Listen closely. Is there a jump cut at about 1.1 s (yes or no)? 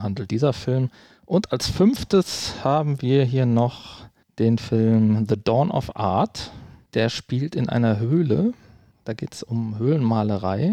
no